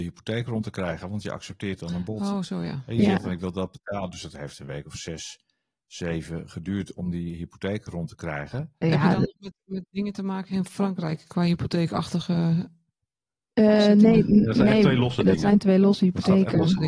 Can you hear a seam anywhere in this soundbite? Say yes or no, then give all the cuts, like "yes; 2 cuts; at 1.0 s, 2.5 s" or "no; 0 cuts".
yes; 1 cut; at 8.8 s